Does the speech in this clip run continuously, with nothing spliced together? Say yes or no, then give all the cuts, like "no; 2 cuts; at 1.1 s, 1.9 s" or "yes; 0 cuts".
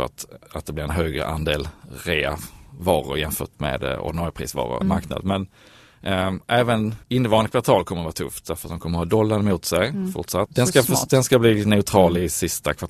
no; 3 cuts; at 4.8 s, 7.0 s, 10.5 s